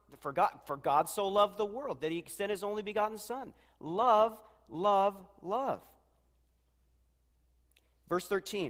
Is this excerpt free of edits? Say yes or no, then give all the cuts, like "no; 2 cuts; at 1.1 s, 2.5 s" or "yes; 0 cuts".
yes; 0 cuts